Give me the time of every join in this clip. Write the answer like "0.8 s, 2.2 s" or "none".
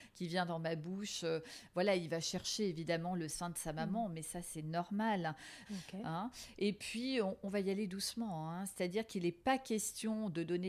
5.7 s